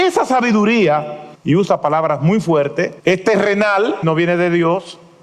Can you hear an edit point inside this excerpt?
yes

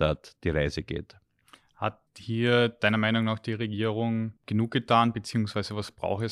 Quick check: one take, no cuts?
no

